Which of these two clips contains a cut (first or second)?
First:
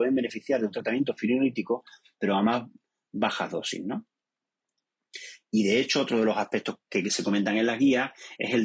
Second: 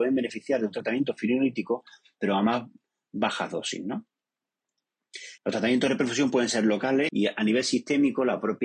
second